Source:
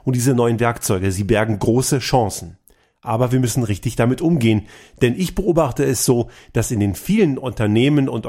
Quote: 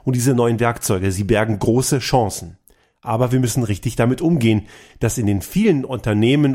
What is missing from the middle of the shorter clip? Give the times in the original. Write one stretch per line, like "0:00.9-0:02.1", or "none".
0:04.9-0:06.4